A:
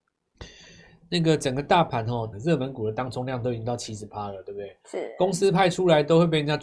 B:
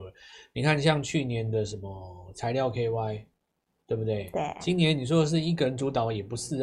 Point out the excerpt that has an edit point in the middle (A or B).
A